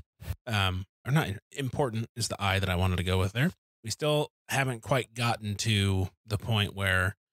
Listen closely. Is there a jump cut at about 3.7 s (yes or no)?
yes